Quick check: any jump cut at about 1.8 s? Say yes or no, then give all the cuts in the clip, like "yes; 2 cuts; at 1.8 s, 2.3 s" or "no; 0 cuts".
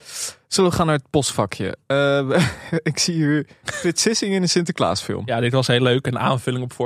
no; 0 cuts